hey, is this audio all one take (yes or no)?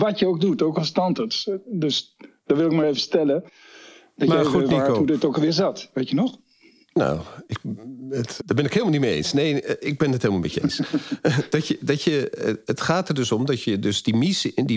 no